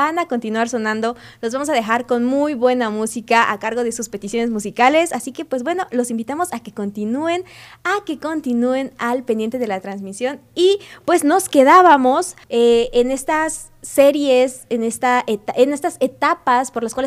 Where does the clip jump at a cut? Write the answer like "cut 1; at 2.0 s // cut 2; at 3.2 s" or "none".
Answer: cut 1; at 12.4 s

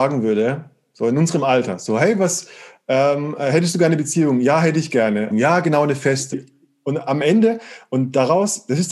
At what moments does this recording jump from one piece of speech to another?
cut 1; at 5.3 s // cut 2; at 6.3 s

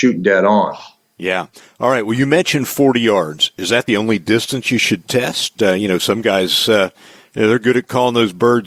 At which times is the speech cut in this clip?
none

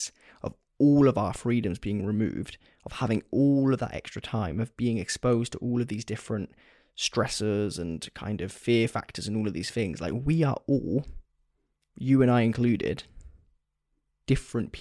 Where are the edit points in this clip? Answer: none

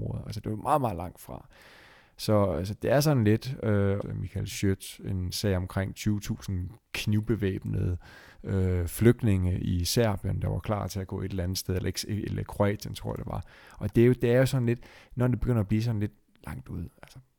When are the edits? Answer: cut 1; at 4.0 s

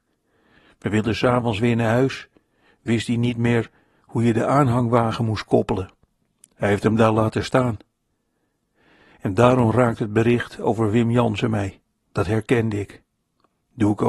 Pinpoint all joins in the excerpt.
cut 1; at 12.0 s

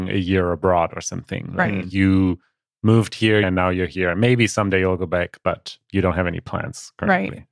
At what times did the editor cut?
cut 1; at 3.4 s

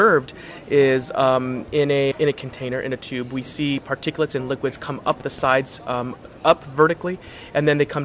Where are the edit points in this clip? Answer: cut 1; at 2.1 s

